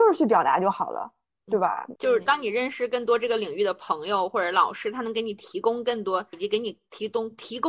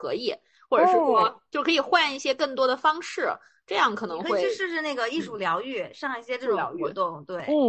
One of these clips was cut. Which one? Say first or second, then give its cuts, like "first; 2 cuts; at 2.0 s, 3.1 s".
first; 2 cuts; at 2.0 s, 6.3 s